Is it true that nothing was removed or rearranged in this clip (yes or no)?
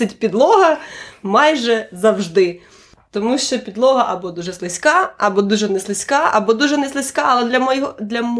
yes